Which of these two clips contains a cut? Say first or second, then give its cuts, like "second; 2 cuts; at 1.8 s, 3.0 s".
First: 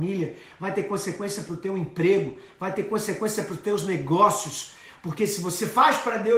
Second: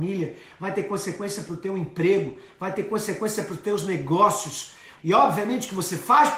second; 1 cut; at 5.0 s